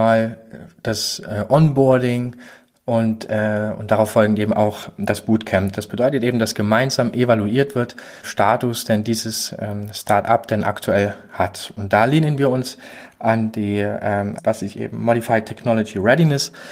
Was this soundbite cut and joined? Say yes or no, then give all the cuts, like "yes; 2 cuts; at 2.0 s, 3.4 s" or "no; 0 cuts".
yes; 2 cuts; at 8.2 s, 14.4 s